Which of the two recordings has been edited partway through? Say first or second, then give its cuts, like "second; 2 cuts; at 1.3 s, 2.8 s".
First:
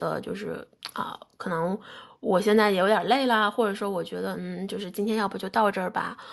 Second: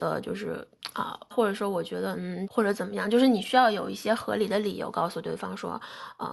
second; 2 cuts; at 1.3 s, 2.5 s